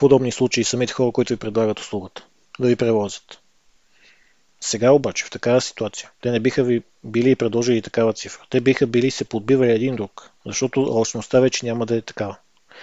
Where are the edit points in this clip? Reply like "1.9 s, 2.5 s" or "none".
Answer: 10.4 s